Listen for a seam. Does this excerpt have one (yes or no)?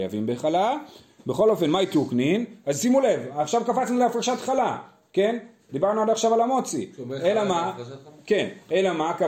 yes